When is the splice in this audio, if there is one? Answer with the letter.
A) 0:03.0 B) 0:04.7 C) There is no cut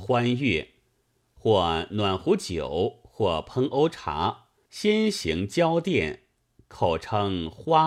B